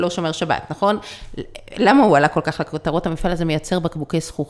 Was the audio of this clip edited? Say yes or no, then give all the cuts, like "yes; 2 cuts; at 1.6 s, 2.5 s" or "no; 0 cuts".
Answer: no; 0 cuts